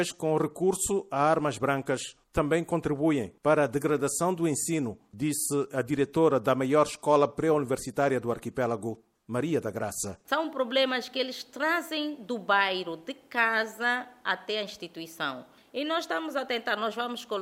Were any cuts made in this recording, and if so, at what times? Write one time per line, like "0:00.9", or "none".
none